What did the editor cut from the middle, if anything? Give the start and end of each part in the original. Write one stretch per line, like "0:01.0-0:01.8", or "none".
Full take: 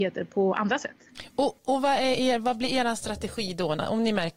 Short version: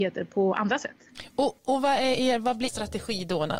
0:02.7-0:03.0